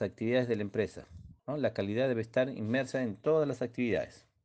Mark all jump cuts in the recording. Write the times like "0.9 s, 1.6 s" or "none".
1.4 s